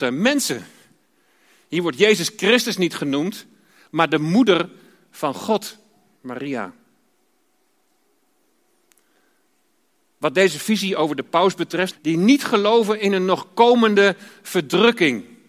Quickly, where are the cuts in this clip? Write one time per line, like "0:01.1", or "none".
0:11.9